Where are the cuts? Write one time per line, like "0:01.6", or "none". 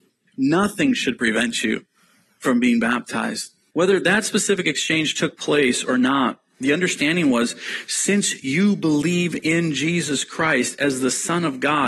0:03.7